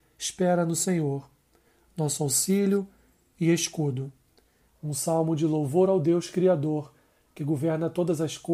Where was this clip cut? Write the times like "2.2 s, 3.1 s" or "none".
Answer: 4.7 s